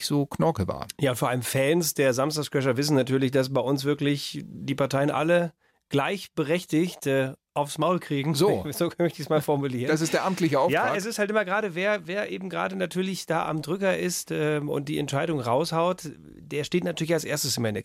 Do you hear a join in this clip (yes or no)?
no